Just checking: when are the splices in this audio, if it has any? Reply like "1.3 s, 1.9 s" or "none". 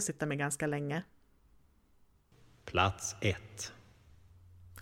none